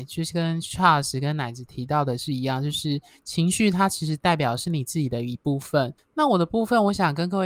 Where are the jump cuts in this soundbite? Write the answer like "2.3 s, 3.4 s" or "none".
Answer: 6.0 s